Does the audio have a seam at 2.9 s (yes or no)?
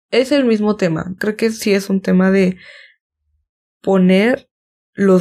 no